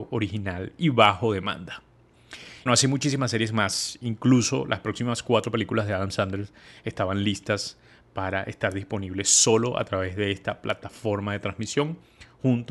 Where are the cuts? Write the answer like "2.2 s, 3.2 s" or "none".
2.7 s